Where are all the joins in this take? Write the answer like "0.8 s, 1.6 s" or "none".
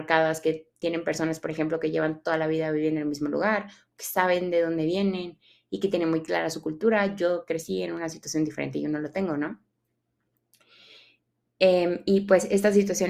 none